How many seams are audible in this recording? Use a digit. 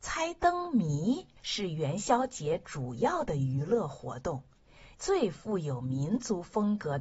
2